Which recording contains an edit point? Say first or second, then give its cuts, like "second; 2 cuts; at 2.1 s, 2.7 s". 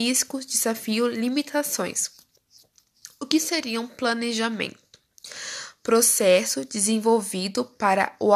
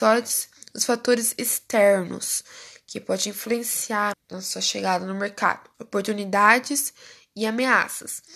second; 2 cuts; at 4.1 s, 5.7 s